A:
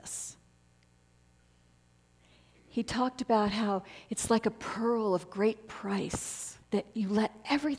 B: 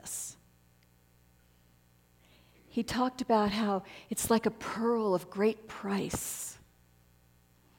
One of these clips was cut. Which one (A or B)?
A